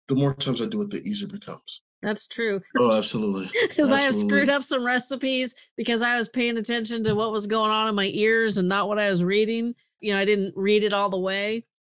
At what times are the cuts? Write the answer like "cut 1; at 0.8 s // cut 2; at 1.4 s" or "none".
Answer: cut 1; at 2.7 s // cut 2; at 10.0 s